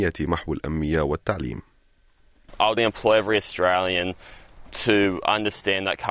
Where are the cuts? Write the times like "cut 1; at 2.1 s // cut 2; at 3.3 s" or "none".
cut 1; at 2.8 s